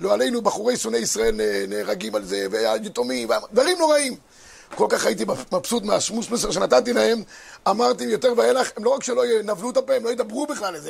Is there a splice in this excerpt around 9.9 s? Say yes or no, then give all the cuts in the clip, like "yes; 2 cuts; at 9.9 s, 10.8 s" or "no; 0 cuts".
no; 0 cuts